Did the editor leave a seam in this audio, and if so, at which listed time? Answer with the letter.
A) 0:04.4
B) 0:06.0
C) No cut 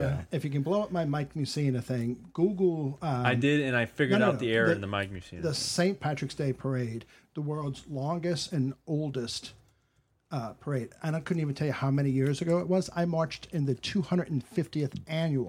B